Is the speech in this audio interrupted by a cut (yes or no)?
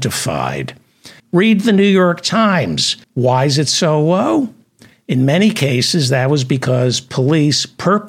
yes